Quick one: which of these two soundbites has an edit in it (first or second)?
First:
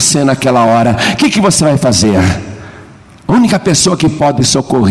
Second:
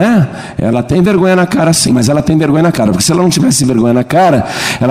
second